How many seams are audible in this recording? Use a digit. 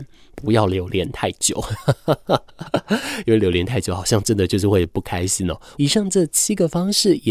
1